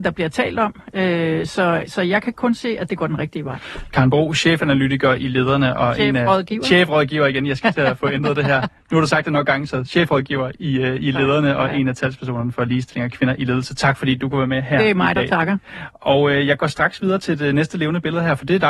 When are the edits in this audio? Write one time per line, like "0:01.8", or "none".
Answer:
none